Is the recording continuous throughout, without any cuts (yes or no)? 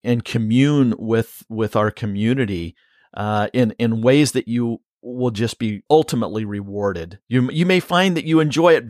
no